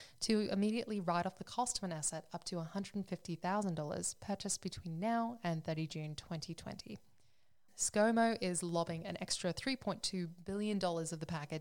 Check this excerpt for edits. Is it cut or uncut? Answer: cut